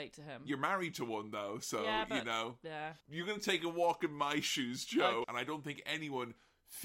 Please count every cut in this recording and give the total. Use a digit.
2